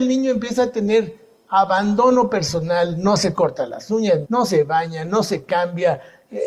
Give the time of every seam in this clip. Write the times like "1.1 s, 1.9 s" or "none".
4.2 s